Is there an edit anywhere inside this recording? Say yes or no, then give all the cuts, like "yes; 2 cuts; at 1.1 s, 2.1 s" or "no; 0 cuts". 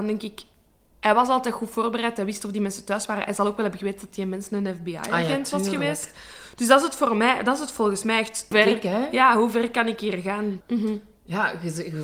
yes; 2 cuts; at 8.5 s, 10.6 s